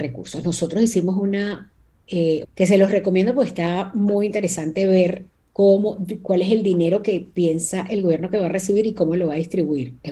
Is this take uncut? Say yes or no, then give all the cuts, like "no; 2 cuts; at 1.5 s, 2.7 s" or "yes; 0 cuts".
no; 1 cut; at 2.4 s